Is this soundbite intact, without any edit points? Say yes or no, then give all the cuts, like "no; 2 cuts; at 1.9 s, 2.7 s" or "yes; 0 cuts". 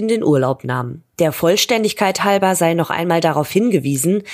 yes; 0 cuts